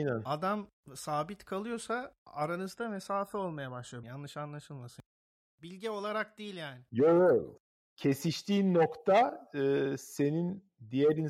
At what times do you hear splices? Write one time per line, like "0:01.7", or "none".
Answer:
0:04.0